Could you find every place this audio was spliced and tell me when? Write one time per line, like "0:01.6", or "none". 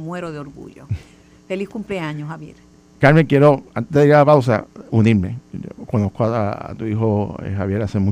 none